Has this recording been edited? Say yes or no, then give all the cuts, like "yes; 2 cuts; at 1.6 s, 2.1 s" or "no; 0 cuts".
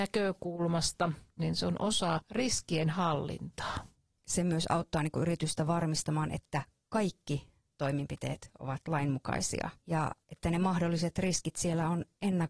yes; 2 cuts; at 1.4 s, 4.2 s